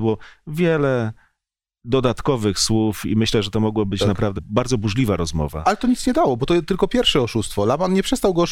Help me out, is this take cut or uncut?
cut